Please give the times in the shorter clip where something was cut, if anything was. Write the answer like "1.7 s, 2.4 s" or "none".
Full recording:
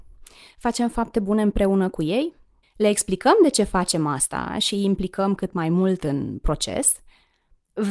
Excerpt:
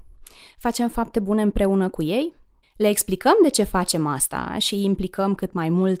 none